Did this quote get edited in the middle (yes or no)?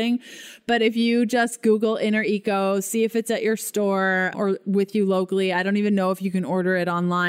yes